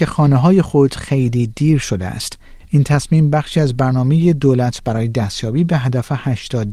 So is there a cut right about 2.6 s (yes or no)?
yes